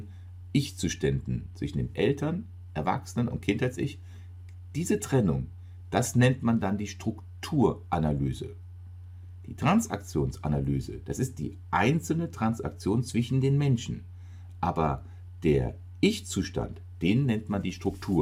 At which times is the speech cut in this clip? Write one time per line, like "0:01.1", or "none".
0:11.0